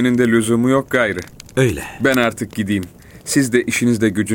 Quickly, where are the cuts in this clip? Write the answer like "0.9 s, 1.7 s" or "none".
none